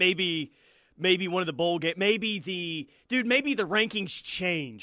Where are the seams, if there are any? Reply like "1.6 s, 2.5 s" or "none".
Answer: none